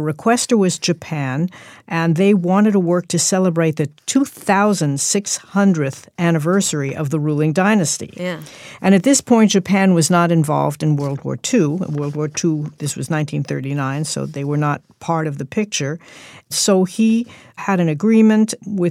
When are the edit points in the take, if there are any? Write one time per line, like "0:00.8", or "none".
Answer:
none

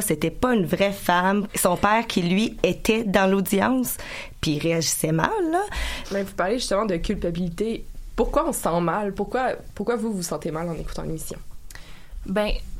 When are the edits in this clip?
0:01.5
0:06.0

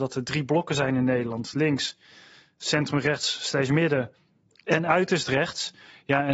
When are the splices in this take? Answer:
none

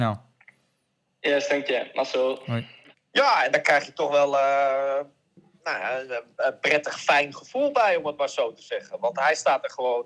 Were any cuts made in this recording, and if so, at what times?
0:02.9

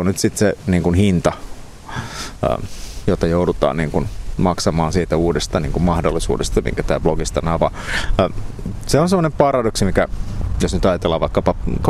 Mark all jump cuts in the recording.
0:03.0

